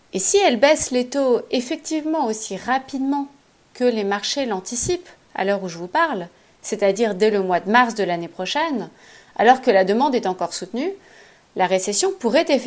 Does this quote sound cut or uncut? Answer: uncut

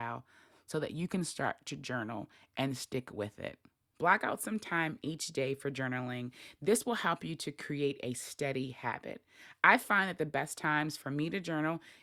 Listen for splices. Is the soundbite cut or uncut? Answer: cut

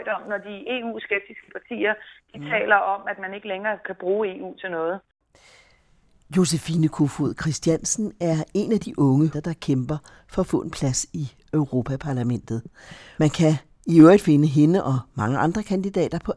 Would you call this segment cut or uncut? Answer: cut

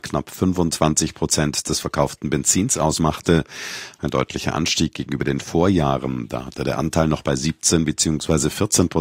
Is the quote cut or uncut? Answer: uncut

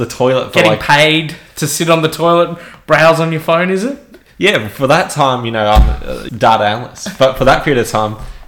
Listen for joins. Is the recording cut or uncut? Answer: cut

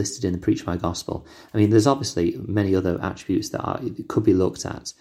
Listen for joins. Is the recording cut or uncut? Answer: uncut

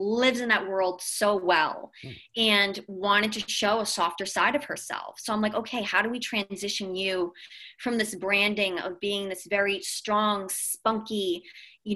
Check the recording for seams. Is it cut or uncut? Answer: uncut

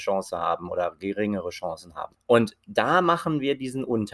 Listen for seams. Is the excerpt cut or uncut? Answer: cut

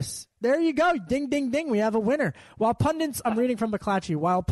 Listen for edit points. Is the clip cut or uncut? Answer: uncut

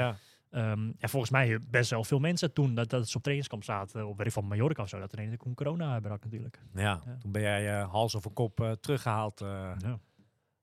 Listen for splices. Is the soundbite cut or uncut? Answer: uncut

